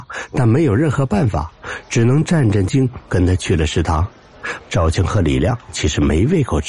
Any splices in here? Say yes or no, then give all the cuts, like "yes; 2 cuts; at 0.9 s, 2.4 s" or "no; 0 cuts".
yes; 2 cuts; at 2.7 s, 4.6 s